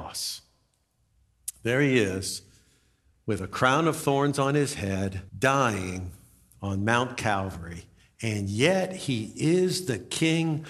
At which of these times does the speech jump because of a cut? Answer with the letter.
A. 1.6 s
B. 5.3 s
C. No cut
B